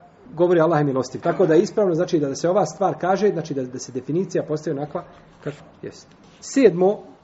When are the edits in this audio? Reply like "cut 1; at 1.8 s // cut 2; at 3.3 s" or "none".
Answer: cut 1; at 1.2 s